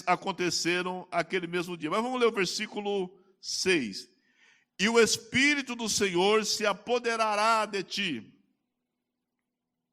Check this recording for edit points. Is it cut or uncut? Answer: uncut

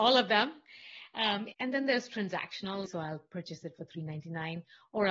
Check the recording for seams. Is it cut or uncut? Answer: cut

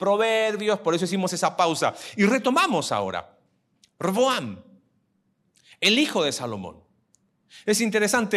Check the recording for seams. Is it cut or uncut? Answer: uncut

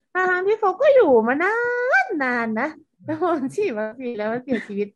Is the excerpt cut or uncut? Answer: uncut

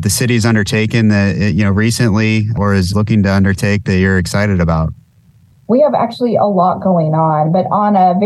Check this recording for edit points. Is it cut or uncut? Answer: uncut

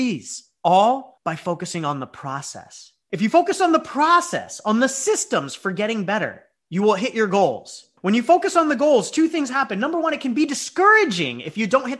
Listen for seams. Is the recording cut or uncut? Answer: uncut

